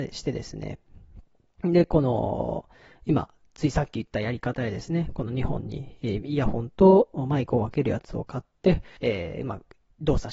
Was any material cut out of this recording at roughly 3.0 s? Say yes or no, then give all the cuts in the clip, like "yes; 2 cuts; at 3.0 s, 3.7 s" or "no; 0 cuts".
no; 1 cut; at 9.0 s